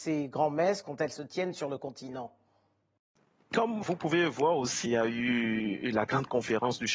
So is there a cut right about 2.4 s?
no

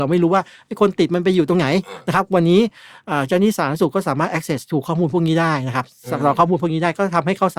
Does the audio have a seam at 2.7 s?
no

